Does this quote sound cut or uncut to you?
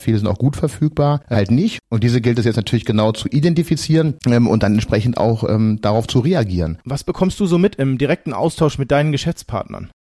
cut